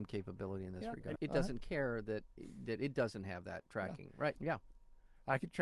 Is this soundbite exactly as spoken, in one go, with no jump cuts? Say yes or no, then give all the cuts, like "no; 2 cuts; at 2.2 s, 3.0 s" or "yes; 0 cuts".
no; 2 cuts; at 1.2 s, 4.4 s